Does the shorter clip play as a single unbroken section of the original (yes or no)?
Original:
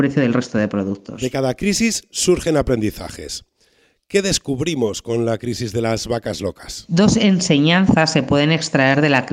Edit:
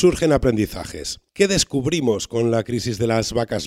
no